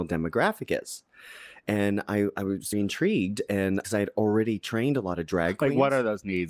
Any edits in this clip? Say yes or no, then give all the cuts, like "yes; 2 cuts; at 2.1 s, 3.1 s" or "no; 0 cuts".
yes; 2 cuts; at 2.7 s, 3.8 s